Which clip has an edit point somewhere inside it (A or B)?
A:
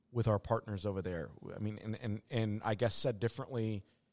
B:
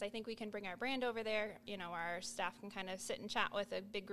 B